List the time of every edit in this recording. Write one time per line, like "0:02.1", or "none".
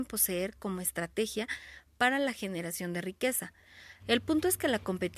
0:04.0